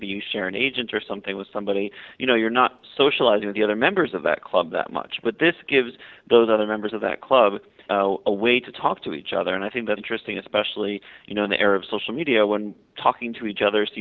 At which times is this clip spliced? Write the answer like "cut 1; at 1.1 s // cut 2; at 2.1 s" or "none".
cut 1; at 7.9 s // cut 2; at 10.0 s